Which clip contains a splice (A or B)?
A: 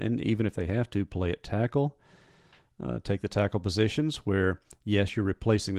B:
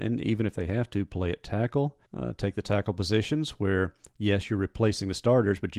B